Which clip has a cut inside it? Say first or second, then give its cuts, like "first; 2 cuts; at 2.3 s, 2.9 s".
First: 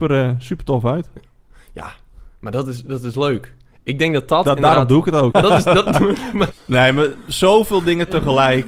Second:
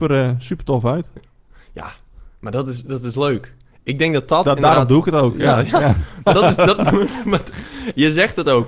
first; 2 cuts; at 5.3 s, 6.5 s